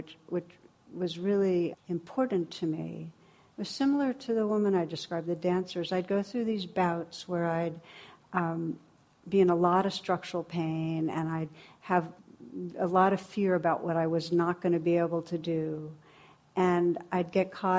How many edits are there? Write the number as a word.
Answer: one